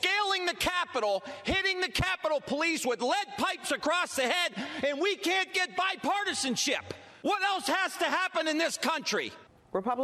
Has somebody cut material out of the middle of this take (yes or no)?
no